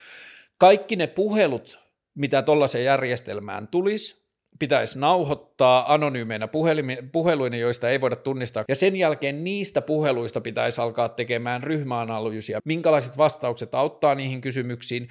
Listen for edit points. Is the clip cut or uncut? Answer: cut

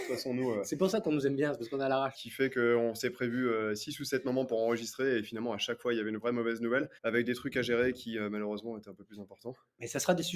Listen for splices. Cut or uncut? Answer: cut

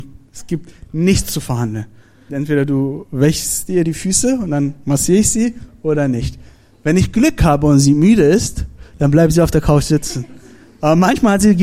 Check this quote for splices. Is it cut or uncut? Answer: cut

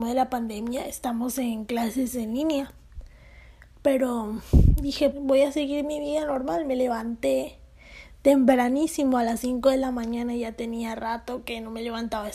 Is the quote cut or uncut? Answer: cut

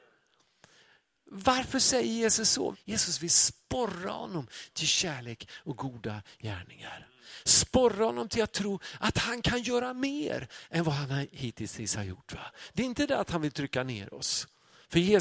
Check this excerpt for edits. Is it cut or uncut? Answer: cut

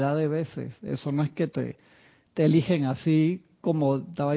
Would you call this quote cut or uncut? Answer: uncut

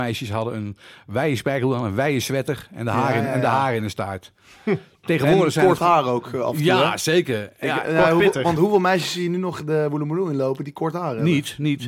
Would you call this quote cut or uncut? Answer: uncut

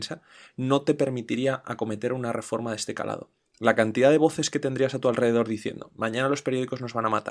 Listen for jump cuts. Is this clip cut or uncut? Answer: uncut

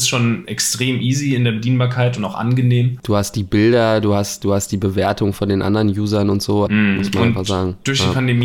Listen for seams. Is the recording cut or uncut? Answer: cut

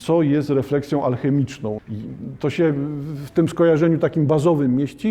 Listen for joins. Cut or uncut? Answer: cut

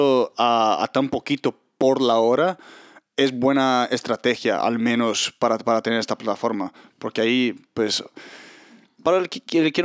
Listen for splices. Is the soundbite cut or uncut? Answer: uncut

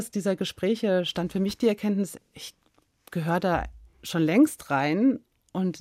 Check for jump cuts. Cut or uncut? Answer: uncut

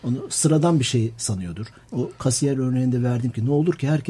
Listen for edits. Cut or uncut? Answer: uncut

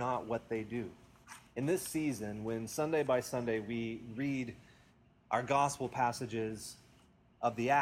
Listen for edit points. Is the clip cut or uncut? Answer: cut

